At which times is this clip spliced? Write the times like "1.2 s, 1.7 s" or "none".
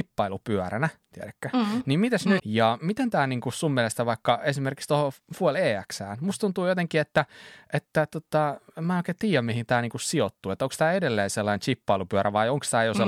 2.4 s

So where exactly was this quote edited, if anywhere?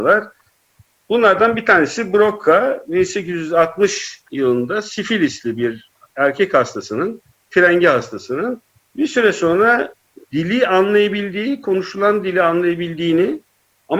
none

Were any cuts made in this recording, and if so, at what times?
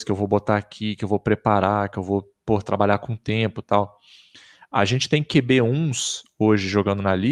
none

